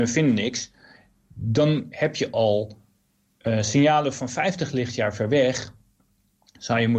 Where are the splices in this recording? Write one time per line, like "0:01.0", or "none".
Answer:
none